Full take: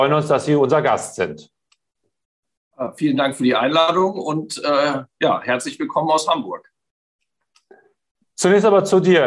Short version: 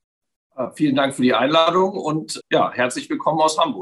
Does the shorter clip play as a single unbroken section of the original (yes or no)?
no